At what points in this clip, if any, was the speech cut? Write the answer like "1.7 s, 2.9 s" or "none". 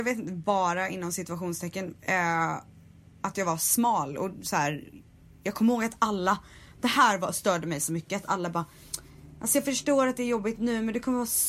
none

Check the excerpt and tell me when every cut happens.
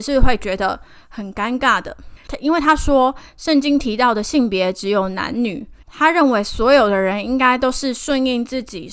2.2 s, 5.8 s

